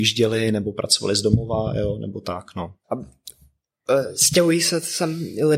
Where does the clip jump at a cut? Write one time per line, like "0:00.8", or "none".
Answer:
0:02.8

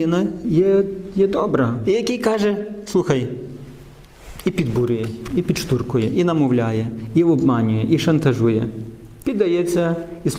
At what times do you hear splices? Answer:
0:01.8
0:09.2

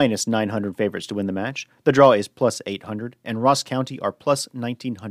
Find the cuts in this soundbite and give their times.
none

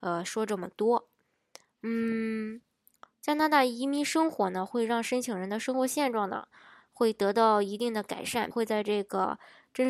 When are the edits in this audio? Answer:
0:08.5

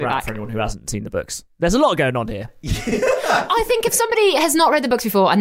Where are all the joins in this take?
none

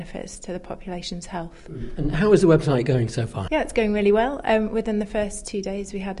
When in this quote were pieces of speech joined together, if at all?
0:03.5

